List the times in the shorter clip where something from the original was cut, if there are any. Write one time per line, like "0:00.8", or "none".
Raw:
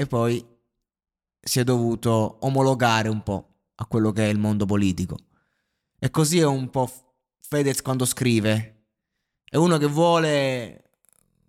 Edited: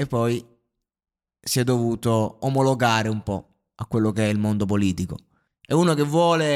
0:05.5

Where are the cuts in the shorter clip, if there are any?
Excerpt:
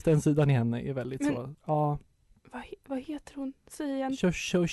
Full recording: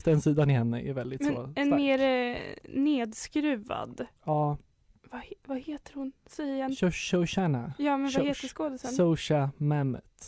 0:01.5

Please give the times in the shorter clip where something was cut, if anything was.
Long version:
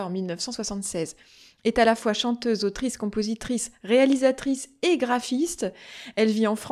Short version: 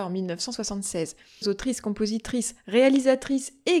0:01.4

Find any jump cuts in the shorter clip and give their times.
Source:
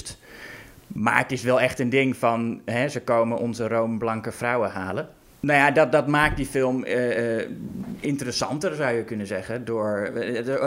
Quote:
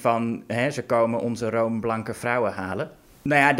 none

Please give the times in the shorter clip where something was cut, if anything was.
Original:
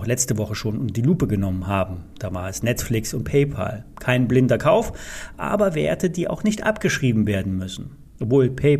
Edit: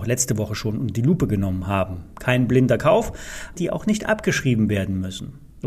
0:02.1
0:03.6

